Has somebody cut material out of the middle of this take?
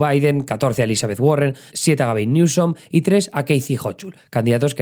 yes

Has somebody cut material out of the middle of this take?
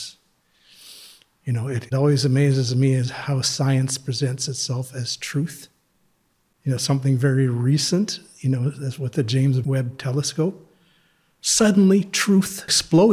no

